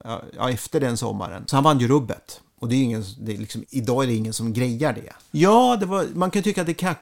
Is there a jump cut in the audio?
yes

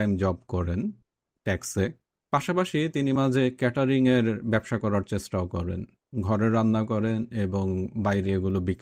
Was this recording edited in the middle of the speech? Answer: yes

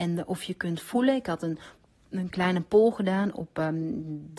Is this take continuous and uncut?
yes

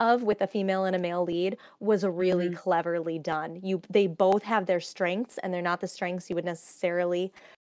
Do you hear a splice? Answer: no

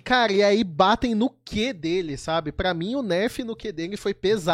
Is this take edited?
no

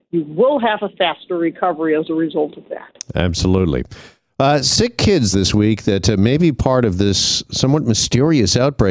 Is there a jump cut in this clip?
yes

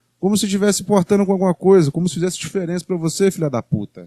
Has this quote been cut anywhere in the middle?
no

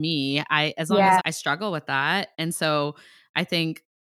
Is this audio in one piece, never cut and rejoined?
no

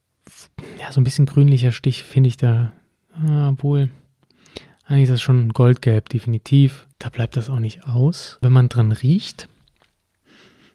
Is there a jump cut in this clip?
yes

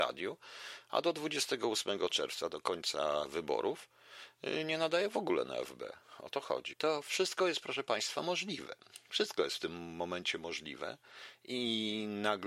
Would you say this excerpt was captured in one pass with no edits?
no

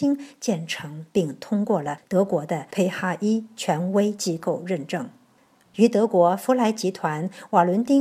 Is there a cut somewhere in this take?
yes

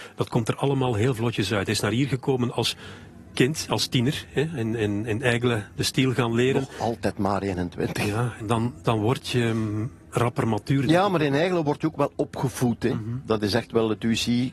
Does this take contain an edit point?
yes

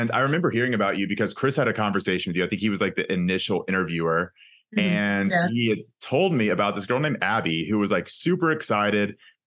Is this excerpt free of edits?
yes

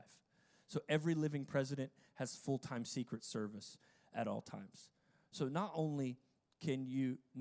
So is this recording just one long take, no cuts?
yes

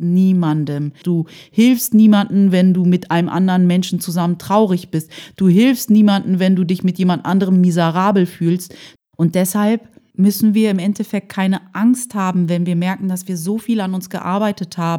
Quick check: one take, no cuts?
no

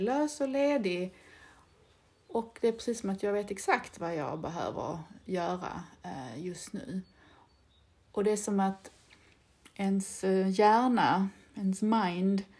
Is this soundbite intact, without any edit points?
yes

